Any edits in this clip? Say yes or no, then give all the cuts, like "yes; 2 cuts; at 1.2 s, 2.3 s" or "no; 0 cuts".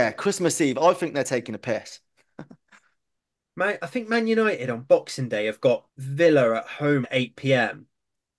yes; 2 cuts; at 5.9 s, 7.0 s